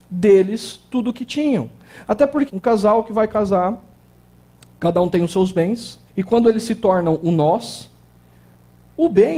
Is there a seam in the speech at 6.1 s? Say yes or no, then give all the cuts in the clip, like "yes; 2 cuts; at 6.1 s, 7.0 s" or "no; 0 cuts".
yes; 2 cuts; at 2.5 s, 6.1 s